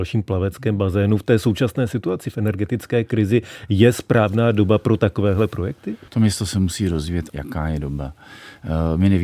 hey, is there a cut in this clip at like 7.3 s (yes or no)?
yes